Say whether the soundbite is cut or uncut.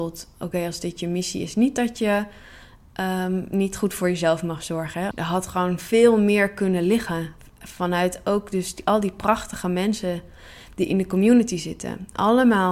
cut